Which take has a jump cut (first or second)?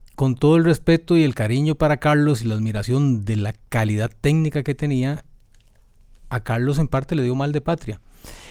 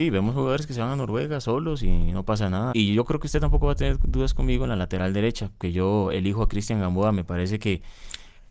second